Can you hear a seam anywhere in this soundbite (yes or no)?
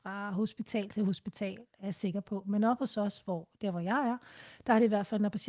no